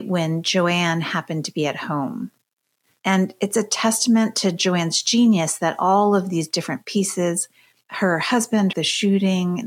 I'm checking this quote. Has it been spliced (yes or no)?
yes